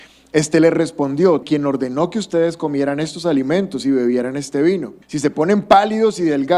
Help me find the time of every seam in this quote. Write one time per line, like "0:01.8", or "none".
0:01.4
0:05.0